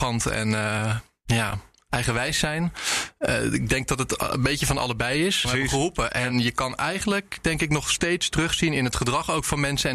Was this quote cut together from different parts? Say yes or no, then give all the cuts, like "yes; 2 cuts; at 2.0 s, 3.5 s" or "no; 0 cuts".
yes; 1 cut; at 5.4 s